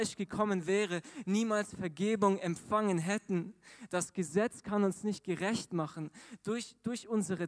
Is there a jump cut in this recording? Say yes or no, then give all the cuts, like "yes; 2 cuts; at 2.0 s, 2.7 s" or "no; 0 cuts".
no; 0 cuts